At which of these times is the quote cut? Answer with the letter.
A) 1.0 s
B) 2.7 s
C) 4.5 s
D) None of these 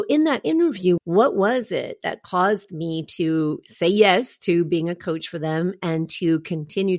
A